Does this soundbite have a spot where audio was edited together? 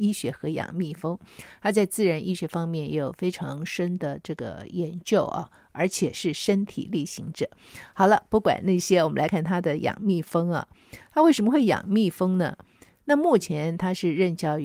yes; 2 cuts; at 9.3 s, 13.0 s

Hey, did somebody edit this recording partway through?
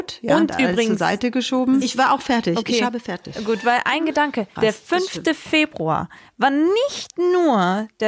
yes; 2 cuts; at 1.8 s, 4.6 s

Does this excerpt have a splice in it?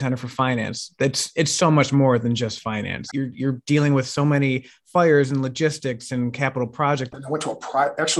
yes; 2 cuts; at 3.1 s, 7.1 s

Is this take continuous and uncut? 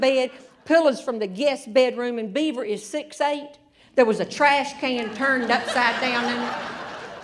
yes; 0 cuts

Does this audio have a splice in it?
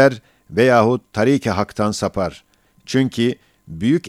no; 0 cuts

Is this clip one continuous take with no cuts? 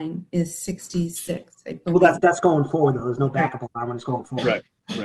yes; 0 cuts

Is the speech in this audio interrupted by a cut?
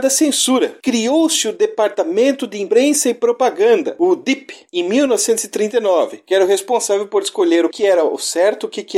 yes; 1 cut; at 7.7 s

